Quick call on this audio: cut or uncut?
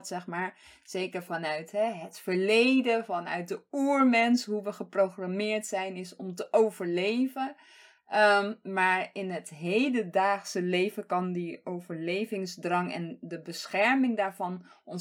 uncut